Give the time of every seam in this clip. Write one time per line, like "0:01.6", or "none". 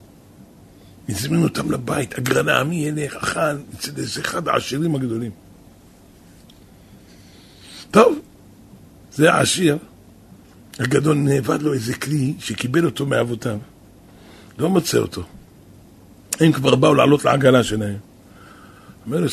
0:09.0